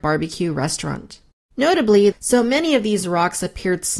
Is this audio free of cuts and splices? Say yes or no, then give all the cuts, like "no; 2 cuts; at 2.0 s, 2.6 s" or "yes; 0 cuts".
no; 1 cut; at 2.1 s